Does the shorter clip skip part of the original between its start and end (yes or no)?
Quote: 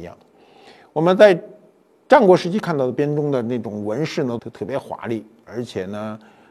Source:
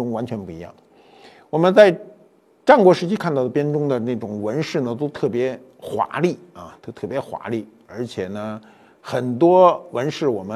yes